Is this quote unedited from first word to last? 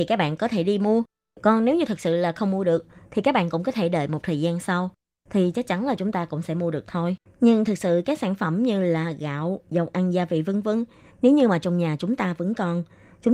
no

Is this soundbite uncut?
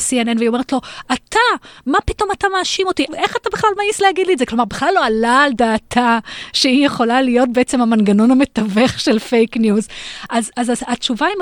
no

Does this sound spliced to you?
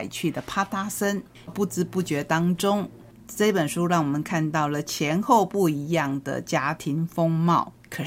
yes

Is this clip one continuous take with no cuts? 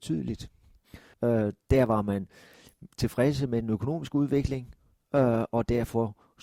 no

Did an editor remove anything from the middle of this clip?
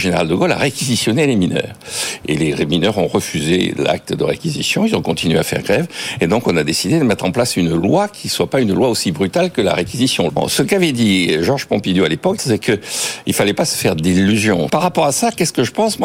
yes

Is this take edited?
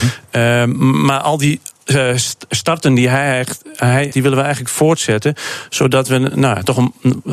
yes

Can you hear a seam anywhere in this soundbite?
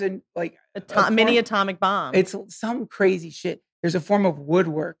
no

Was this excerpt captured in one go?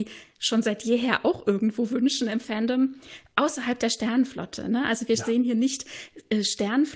yes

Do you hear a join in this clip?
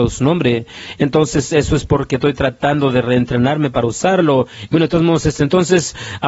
yes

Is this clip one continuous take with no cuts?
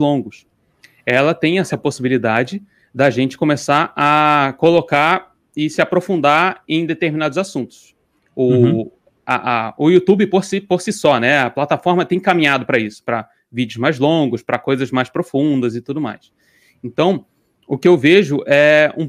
yes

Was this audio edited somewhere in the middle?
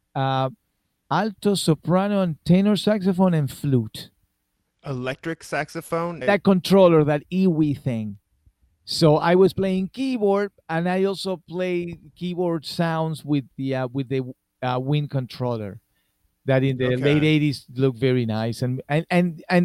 yes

